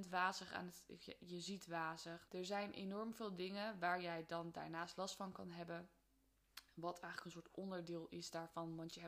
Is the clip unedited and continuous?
no; 1 cut; at 2.3 s

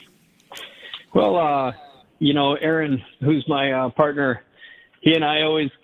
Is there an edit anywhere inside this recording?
no; 0 cuts

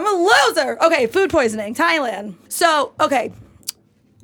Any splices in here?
yes; 1 cut; at 2.5 s

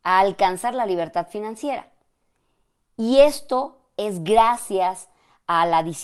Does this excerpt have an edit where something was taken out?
no; 0 cuts

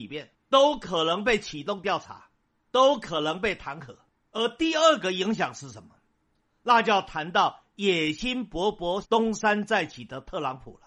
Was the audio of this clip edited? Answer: yes; 1 cut; at 9.0 s

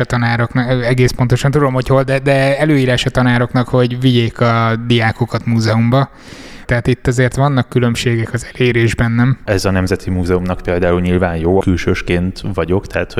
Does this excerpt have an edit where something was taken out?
yes; 3 cuts; at 6.6 s, 9.5 s, 11.6 s

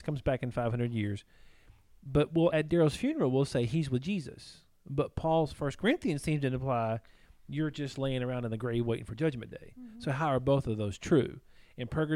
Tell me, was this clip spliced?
no; 0 cuts

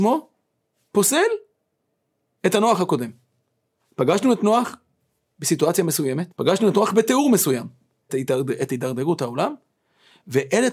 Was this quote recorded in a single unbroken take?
no; 2 cuts; at 6.3 s, 8.1 s

